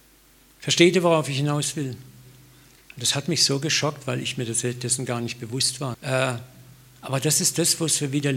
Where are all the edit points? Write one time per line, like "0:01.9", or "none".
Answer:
0:02.8
0:05.9